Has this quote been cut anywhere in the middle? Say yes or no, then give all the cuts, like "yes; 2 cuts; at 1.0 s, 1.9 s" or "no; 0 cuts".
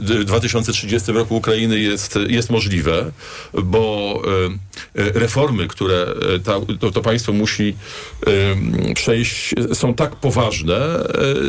no; 0 cuts